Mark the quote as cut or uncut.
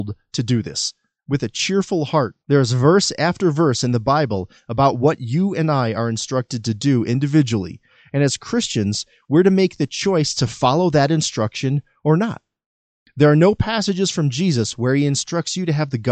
cut